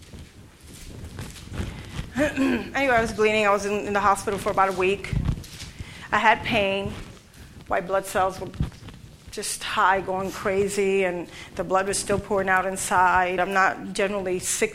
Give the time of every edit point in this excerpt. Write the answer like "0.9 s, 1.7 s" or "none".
13.4 s